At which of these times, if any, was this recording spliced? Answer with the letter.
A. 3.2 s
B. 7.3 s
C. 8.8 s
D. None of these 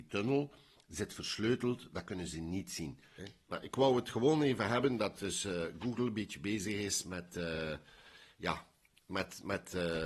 A